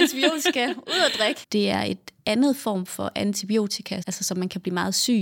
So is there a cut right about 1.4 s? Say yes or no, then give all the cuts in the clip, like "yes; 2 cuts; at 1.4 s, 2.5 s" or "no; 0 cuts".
yes; 2 cuts; at 1.4 s, 4.0 s